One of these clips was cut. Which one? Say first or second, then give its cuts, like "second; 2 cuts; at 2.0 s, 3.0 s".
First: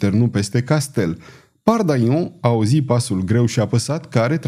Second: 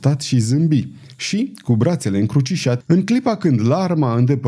second; 1 cut; at 2.8 s